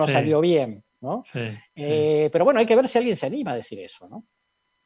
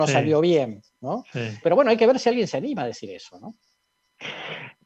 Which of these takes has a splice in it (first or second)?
second